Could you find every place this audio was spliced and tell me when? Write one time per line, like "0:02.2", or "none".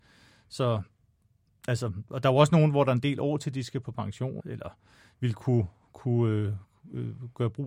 0:04.4

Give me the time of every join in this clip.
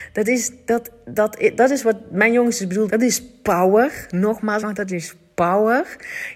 0:02.9
0:04.6

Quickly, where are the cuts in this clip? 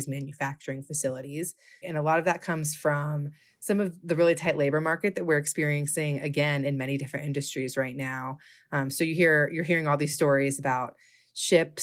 0:01.8

